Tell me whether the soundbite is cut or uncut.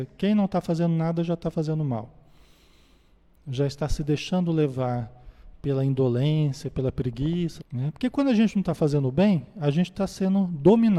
cut